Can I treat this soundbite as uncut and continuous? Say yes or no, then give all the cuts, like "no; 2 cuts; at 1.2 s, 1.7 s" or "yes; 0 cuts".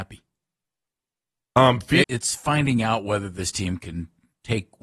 no; 1 cut; at 2.0 s